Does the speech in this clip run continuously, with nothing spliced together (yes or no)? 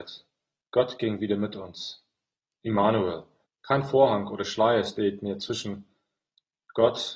no